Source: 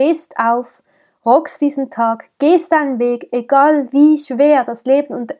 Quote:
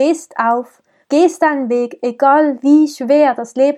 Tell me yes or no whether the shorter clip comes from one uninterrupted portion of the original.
no